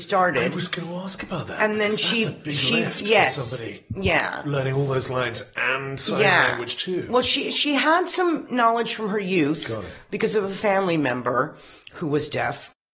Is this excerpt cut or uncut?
uncut